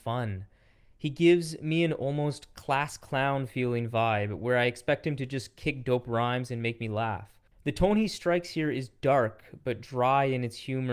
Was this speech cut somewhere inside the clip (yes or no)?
yes